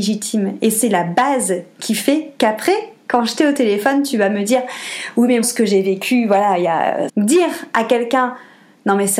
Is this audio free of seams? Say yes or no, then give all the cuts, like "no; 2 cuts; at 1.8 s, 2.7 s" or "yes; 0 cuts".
no; 2 cuts; at 5.4 s, 7.1 s